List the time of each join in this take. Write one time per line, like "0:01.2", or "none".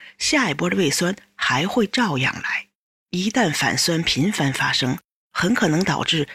0:02.9

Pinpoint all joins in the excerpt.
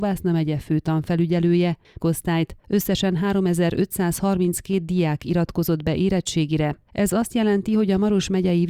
0:02.0
0:06.8

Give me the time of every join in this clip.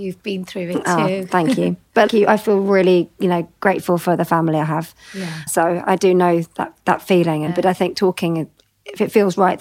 0:02.1
0:05.5
0:07.5

